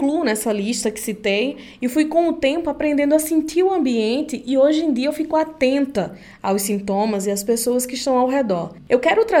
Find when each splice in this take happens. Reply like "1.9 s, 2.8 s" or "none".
none